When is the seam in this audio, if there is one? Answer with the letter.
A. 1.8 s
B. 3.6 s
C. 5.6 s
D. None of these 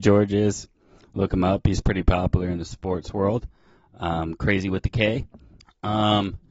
C